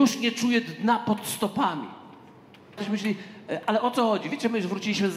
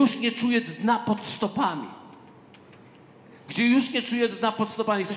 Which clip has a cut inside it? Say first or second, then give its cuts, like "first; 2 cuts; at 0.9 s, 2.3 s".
first; 1 cut; at 2.8 s